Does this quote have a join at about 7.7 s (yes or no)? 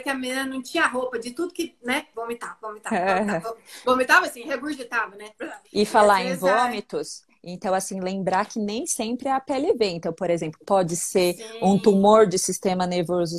no